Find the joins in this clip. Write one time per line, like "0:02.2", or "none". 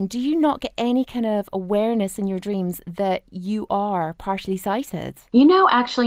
none